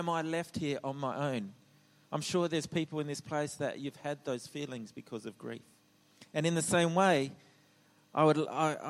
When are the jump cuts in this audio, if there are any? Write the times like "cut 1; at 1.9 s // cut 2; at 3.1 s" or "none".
none